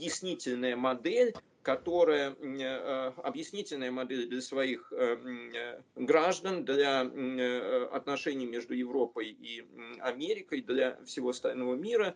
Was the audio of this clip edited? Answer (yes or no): yes